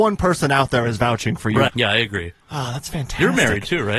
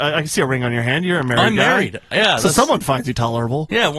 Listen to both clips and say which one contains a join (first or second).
first